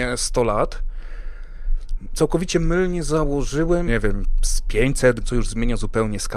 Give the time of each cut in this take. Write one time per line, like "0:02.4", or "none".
0:03.9
0:05.2